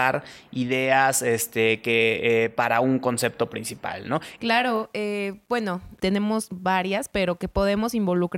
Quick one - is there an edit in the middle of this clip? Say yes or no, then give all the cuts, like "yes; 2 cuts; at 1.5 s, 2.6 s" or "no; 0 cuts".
yes; 2 cuts; at 4.4 s, 6.0 s